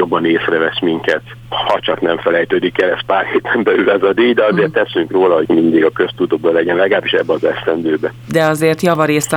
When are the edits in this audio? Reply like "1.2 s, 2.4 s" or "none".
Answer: 5.5 s